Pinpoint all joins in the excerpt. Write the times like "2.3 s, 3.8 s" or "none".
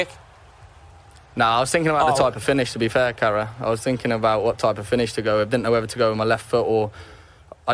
none